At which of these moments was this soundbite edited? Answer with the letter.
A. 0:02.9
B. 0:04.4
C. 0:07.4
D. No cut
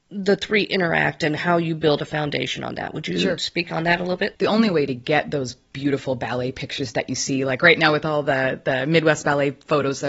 B